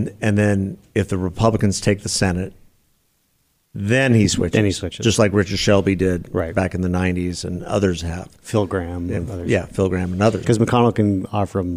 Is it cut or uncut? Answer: cut